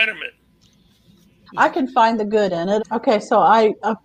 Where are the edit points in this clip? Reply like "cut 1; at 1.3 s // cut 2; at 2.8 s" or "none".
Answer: cut 1; at 1.5 s // cut 2; at 2.8 s